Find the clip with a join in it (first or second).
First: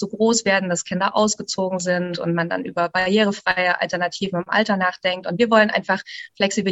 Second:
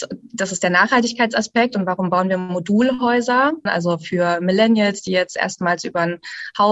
second